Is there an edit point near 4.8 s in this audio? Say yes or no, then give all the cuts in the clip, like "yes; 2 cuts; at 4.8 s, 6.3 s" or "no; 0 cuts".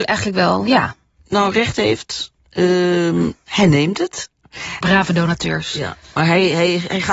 yes; 1 cut; at 4.8 s